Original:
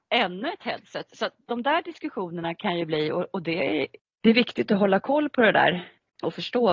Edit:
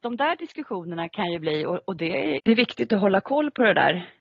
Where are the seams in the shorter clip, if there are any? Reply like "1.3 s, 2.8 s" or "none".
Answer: 2.4 s